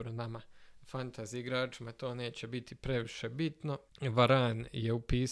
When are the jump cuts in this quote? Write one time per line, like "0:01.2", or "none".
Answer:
none